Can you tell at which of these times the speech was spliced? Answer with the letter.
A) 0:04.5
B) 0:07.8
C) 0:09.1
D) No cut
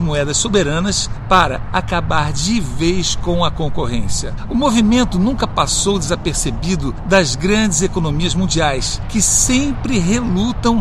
A